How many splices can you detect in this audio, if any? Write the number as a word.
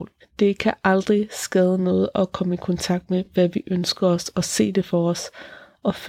zero